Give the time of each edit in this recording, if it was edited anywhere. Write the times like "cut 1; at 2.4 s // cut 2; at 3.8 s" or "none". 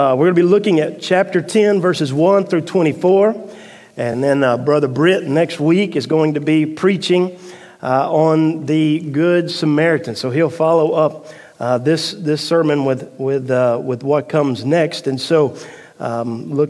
none